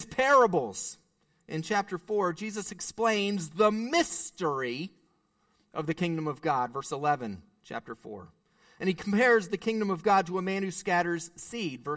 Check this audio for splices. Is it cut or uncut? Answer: uncut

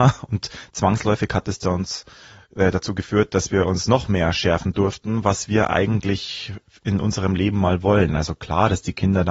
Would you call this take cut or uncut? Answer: uncut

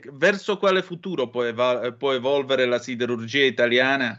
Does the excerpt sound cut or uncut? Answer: uncut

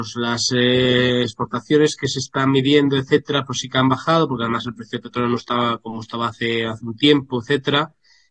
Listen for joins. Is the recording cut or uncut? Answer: uncut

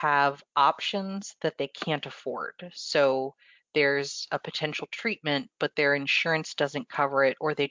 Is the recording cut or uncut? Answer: uncut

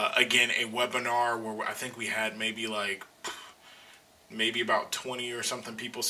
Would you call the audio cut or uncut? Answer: uncut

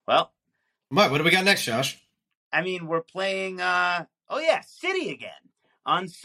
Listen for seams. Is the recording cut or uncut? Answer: uncut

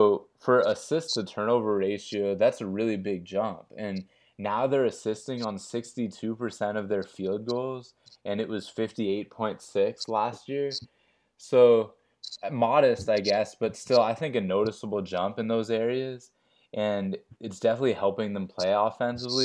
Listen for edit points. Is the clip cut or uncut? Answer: uncut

